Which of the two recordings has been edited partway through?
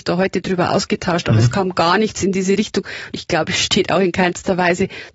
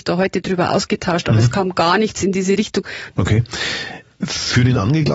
second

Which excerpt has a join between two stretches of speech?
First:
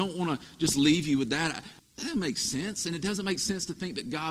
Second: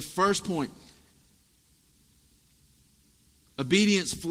first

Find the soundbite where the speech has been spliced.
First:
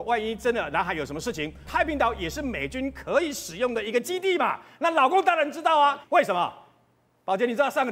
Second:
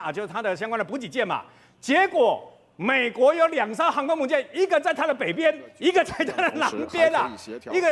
first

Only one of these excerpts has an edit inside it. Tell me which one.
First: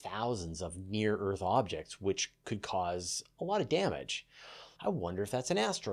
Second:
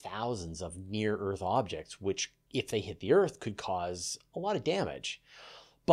first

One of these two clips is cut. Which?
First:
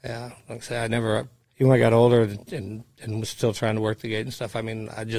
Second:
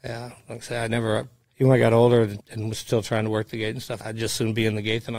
second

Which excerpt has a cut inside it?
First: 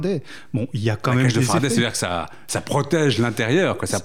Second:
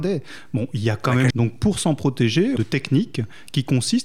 second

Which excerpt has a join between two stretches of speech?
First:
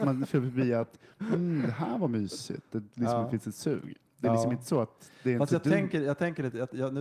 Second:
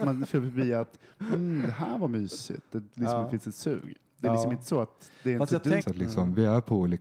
second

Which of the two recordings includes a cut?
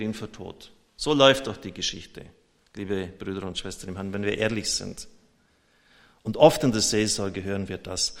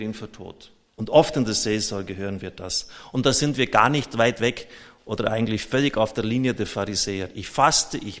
second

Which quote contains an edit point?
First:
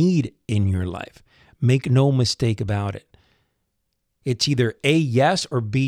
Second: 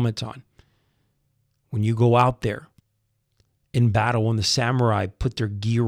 first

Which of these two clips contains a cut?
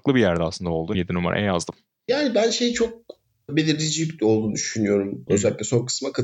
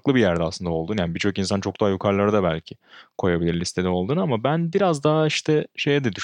first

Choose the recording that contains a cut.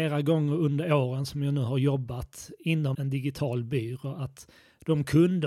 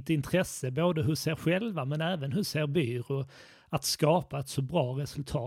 first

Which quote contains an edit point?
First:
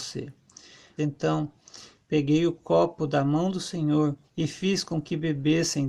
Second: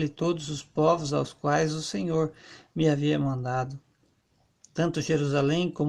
first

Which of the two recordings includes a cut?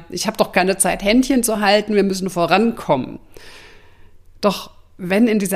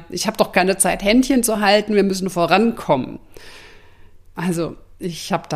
second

